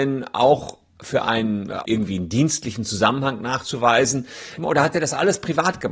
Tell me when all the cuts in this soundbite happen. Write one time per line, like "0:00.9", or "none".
0:01.8
0:04.6